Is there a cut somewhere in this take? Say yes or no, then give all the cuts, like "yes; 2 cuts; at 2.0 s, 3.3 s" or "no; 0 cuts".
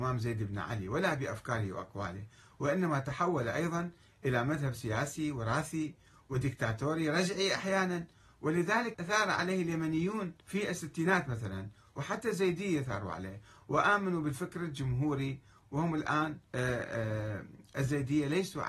yes; 3 cuts; at 8.9 s, 10.4 s, 16.5 s